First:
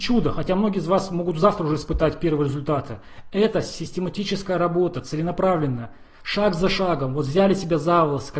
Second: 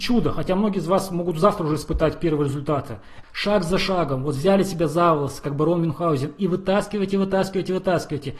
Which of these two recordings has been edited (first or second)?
second